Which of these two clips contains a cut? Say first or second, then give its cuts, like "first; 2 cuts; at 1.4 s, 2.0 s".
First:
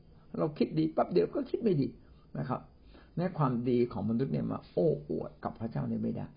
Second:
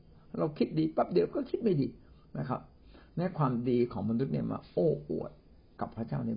first; 1 cut; at 5.4 s